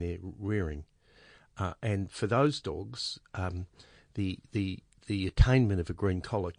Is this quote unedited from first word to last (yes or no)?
yes